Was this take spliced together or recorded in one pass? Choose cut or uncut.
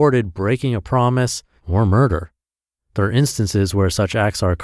cut